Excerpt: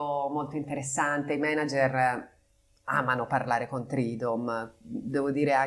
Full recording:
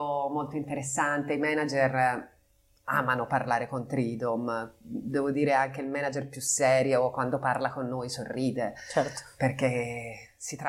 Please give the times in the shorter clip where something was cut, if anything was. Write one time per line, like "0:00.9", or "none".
none